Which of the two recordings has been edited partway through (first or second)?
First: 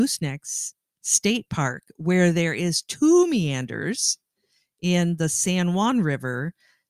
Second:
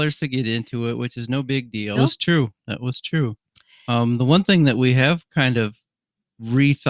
second